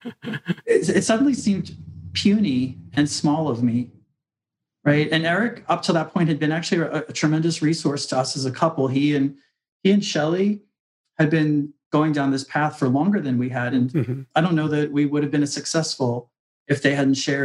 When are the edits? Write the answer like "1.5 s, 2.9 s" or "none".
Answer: none